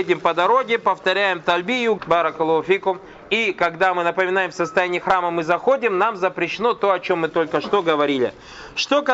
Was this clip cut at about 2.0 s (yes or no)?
yes